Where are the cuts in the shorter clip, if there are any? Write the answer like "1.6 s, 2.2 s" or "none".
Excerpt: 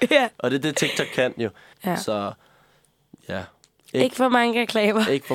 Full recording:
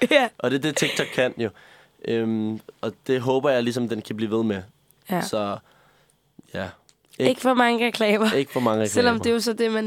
1.7 s